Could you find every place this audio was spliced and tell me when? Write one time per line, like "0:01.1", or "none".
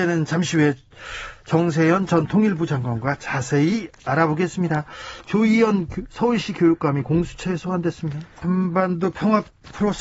0:08.4